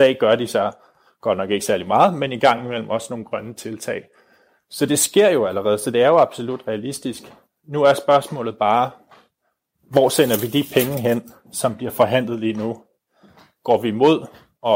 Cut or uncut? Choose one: uncut